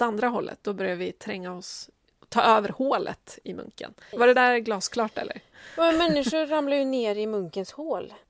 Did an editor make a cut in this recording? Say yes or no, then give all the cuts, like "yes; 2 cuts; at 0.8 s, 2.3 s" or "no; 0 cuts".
yes; 1 cut; at 4.1 s